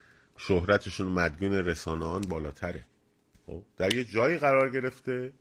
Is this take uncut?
no; 1 cut; at 3.7 s

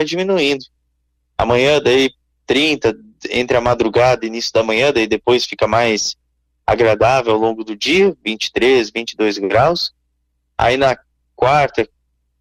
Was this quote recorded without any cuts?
yes; 0 cuts

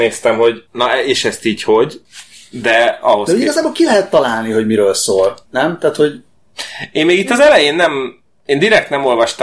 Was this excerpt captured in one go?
yes; 0 cuts

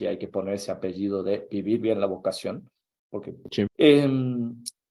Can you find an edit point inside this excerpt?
yes; 1 cut; at 3.7 s

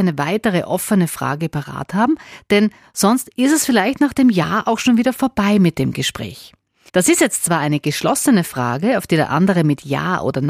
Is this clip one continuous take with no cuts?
no; 1 cut; at 6.9 s

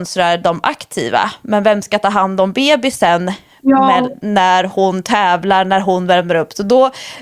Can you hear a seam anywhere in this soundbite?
no; 0 cuts

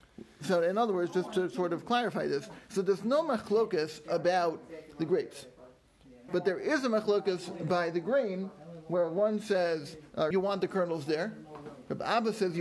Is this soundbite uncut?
no; 2 cuts; at 6.3 s, 10.3 s

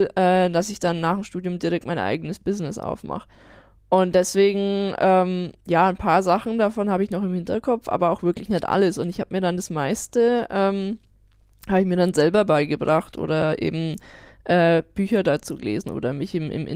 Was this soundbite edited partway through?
no; 0 cuts

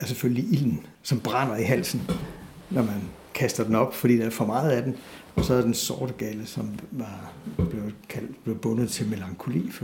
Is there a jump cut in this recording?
yes; 1 cut; at 0.9 s

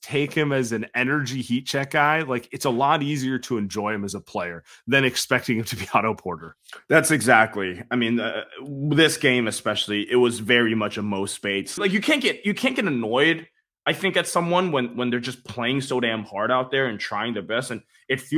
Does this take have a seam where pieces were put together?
yes; 1 cut; at 11.8 s

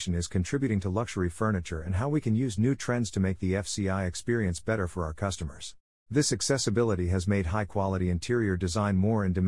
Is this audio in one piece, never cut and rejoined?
no; 1 cut; at 5.9 s

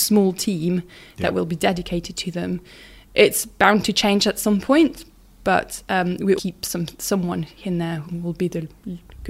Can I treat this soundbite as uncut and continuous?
no; 2 cuts; at 6.4 s, 8.0 s

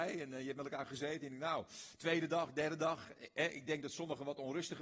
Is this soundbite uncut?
yes; 0 cuts

